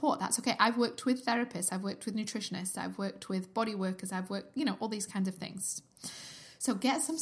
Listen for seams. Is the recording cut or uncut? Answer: uncut